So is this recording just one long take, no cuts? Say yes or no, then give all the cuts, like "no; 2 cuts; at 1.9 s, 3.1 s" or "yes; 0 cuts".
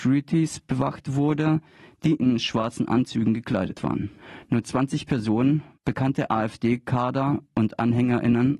yes; 0 cuts